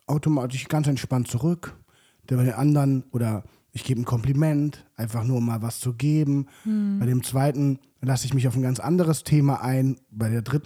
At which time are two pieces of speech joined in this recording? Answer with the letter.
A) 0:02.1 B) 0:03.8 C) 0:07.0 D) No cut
D